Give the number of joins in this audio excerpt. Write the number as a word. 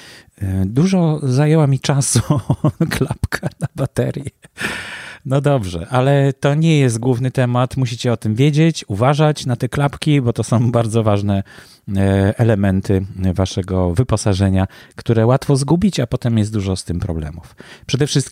zero